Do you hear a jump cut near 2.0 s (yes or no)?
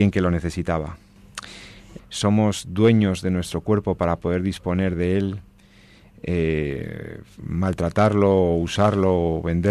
yes